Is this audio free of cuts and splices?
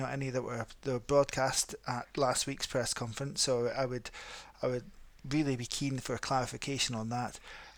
yes; 0 cuts

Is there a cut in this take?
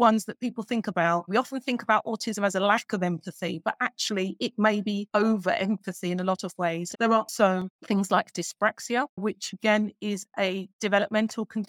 yes; 2 cuts; at 1.3 s, 6.9 s

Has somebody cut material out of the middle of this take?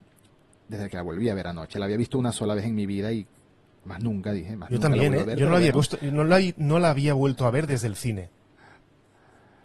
no; 0 cuts

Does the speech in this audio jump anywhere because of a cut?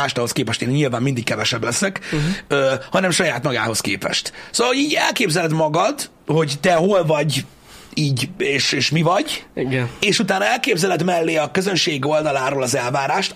yes; 1 cut; at 6.2 s

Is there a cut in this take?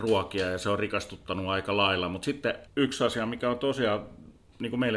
yes; 1 cut; at 2.7 s

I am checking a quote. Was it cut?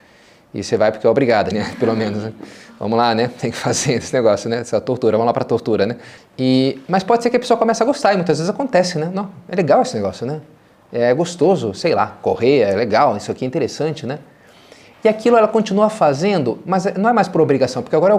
yes; 2 cuts; at 1.5 s, 6.2 s

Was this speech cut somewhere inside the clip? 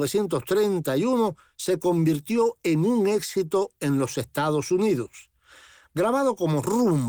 no; 0 cuts

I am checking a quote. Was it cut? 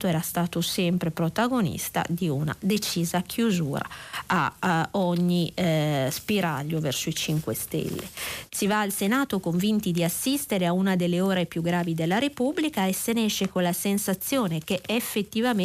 yes; 1 cut; at 8.5 s

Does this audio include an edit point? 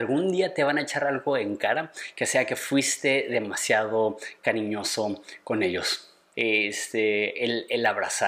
yes; 1 cut; at 6.3 s

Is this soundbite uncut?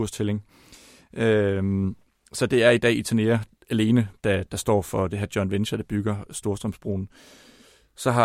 yes; 0 cuts

